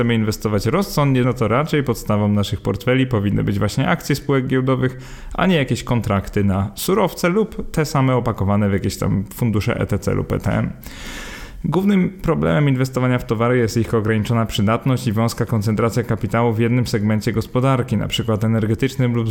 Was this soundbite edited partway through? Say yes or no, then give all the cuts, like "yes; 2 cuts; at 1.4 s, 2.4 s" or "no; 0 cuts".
yes; 1 cut; at 1.2 s